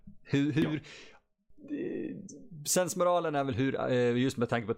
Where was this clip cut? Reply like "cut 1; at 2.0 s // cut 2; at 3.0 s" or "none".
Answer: none